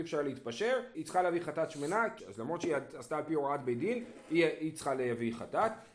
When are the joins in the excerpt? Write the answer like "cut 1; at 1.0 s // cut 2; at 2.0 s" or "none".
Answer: cut 1; at 0.9 s // cut 2; at 2.2 s